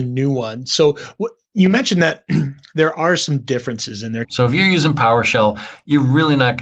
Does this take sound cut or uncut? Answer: cut